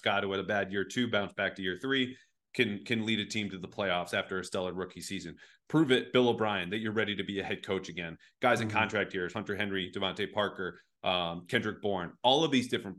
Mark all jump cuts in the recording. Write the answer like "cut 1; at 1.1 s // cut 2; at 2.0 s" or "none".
none